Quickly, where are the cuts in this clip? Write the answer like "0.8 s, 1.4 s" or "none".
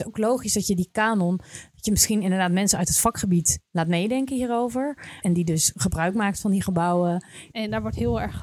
5.2 s, 7.5 s